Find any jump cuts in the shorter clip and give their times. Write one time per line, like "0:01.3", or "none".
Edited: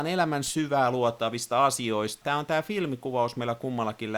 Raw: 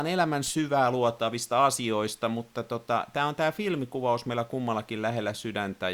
0:02.2